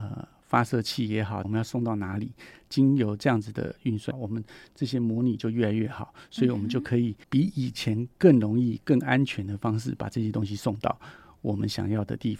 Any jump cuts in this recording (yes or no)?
yes